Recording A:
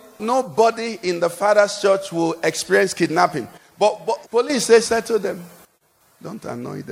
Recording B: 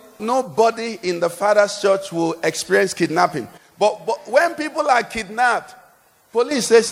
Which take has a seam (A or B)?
A